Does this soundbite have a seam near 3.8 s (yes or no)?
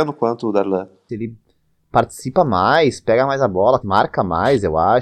yes